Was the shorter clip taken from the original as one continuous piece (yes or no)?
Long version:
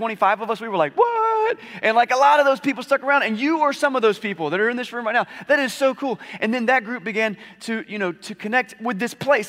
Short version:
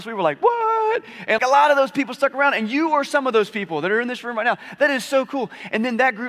no